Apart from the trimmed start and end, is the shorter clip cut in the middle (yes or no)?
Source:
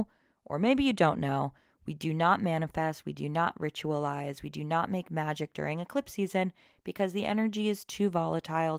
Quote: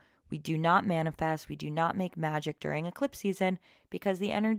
yes